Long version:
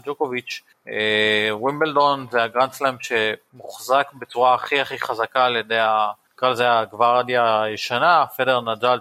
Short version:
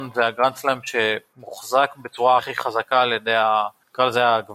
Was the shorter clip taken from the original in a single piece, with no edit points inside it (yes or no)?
no